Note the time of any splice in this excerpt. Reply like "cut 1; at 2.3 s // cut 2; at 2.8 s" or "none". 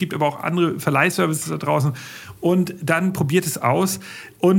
none